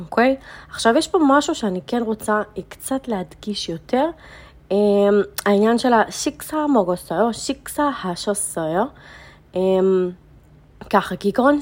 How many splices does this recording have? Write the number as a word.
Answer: zero